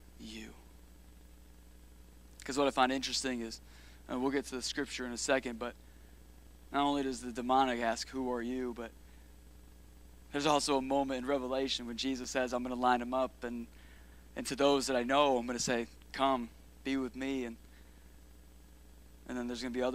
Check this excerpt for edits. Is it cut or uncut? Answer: uncut